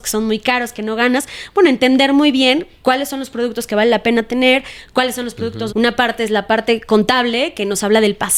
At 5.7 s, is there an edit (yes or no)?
yes